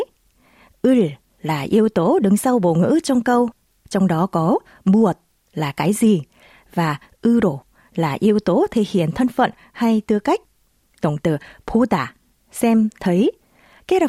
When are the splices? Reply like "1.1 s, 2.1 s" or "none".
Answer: 3.7 s